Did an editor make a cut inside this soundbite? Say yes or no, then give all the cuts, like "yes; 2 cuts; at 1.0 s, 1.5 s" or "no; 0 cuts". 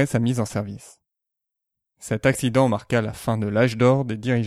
no; 0 cuts